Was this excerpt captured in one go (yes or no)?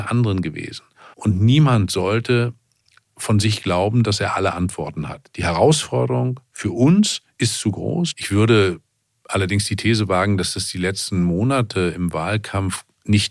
no